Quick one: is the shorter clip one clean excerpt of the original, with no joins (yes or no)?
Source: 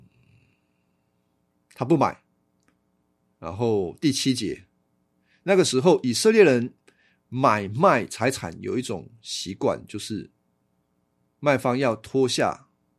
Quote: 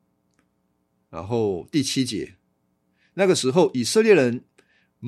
yes